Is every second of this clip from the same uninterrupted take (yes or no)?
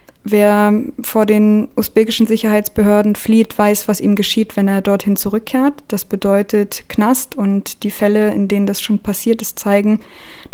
yes